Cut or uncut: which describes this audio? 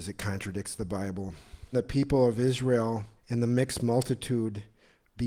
cut